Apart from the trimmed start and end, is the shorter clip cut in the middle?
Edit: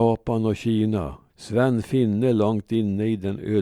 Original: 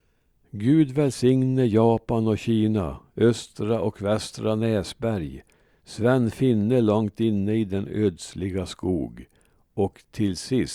yes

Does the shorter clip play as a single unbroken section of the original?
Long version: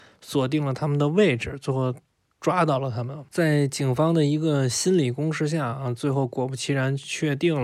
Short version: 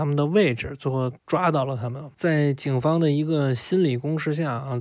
no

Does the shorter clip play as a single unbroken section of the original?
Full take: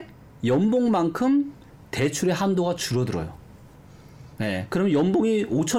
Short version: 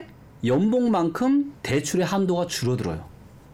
no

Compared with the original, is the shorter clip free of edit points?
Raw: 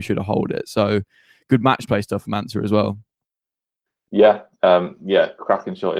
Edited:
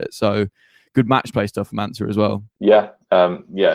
no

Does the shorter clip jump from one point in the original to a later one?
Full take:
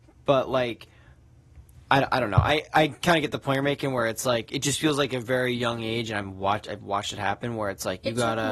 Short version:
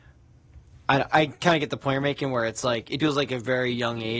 yes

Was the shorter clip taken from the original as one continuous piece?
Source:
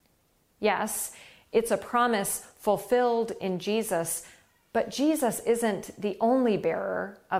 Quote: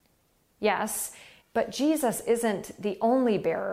no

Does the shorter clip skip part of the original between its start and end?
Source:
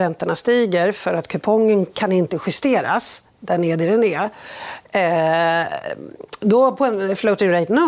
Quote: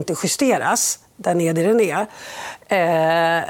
no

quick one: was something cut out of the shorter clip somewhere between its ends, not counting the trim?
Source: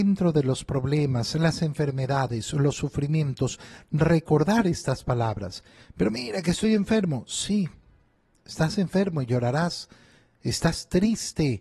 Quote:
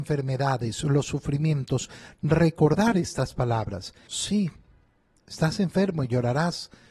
yes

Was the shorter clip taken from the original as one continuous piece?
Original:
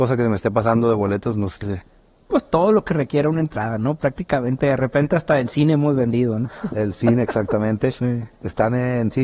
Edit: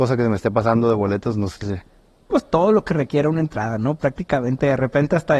yes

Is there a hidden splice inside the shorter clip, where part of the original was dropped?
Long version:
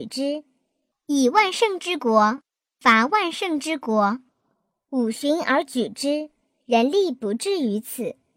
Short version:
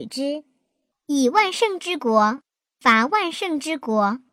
no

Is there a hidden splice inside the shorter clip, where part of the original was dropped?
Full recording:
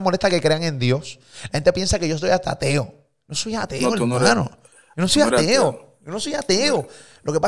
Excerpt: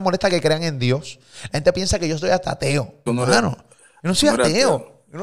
yes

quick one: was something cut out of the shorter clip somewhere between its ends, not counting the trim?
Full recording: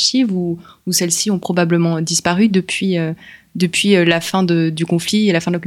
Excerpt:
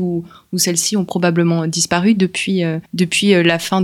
yes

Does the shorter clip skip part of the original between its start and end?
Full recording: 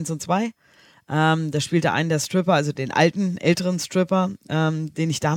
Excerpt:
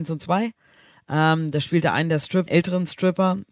yes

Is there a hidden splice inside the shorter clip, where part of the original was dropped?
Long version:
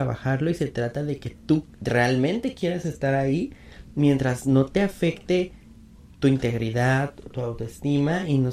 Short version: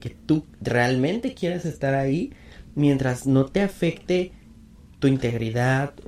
no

